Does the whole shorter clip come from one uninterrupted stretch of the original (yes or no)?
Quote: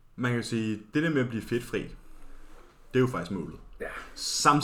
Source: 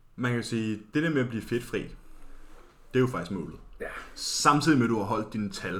yes